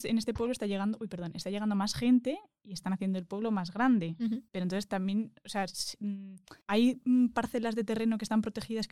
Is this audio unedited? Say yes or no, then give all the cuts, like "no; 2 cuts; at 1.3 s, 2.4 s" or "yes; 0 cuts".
no; 2 cuts; at 4.5 s, 6.6 s